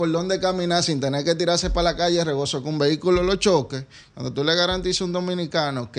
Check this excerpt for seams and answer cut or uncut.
uncut